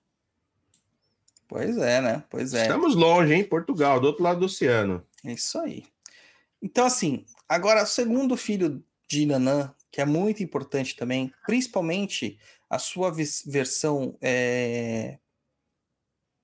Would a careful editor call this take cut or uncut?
uncut